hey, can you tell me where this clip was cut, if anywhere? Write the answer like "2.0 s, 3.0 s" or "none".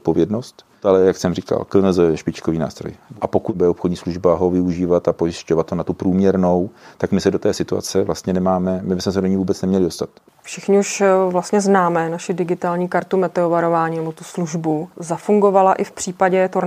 none

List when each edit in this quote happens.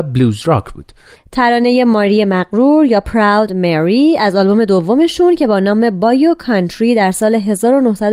1.2 s

